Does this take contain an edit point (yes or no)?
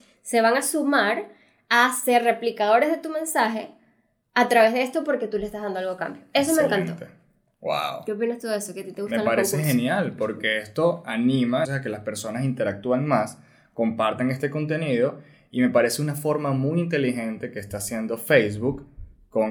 yes